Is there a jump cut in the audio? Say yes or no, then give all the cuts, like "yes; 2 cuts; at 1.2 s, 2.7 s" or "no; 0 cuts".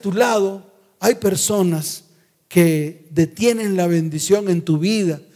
no; 0 cuts